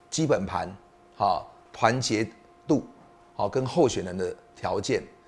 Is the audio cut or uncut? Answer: cut